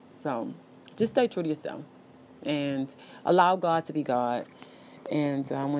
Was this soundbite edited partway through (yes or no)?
no